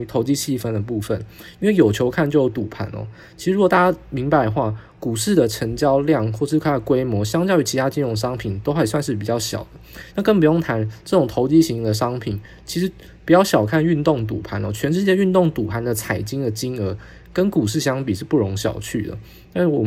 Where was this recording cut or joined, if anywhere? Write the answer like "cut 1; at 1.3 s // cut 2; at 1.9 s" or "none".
cut 1; at 10.1 s